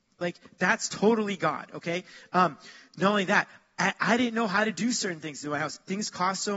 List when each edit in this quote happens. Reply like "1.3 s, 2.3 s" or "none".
none